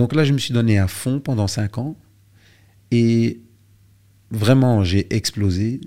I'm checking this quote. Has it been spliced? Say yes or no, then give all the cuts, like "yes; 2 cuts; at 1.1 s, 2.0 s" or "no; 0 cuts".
no; 0 cuts